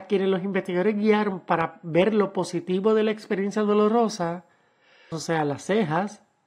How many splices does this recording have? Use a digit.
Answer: 1